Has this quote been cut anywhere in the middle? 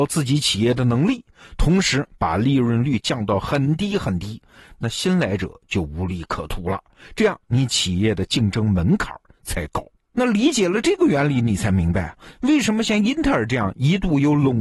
no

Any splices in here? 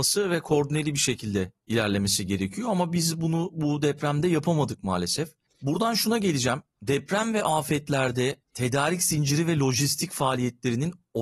no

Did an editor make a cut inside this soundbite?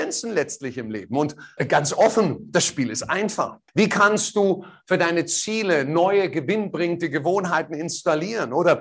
yes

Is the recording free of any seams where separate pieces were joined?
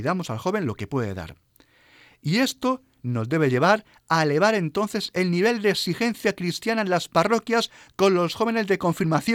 yes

